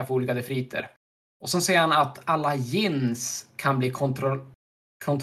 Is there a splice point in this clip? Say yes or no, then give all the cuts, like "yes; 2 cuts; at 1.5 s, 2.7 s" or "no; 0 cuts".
no; 0 cuts